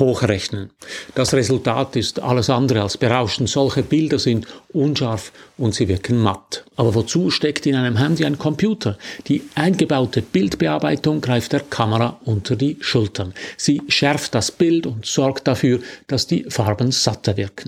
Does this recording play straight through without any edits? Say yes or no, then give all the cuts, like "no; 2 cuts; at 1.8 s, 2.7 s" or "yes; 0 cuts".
no; 1 cut; at 6.7 s